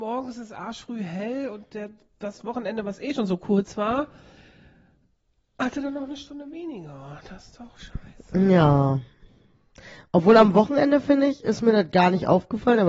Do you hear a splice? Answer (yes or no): no